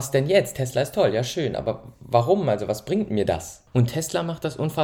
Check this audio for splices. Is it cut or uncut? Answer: cut